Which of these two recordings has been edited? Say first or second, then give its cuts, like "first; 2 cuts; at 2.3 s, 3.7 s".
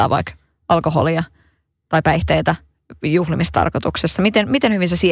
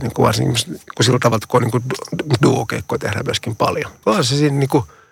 second; 1 cut; at 4.0 s